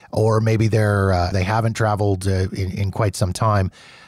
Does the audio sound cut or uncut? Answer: cut